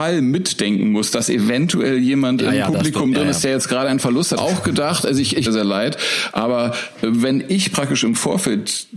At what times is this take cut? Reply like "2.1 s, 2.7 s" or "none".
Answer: 4.4 s, 5.5 s